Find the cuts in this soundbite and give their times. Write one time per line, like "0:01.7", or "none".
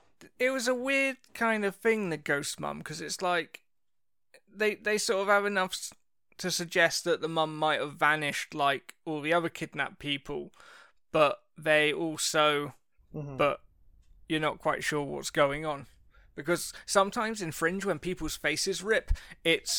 0:13.0